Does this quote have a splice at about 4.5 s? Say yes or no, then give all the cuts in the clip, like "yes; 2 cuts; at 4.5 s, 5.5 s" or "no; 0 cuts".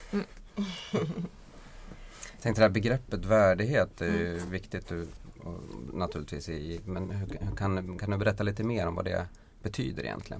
no; 0 cuts